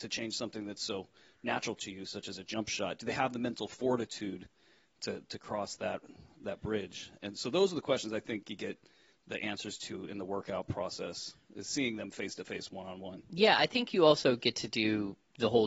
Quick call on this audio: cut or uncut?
uncut